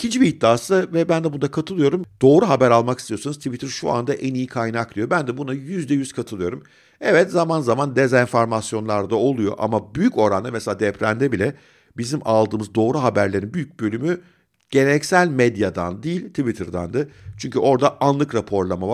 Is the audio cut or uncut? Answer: uncut